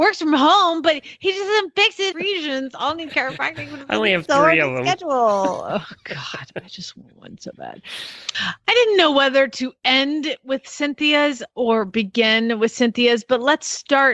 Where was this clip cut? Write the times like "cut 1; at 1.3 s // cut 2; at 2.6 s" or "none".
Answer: cut 1; at 2.1 s // cut 2; at 8.3 s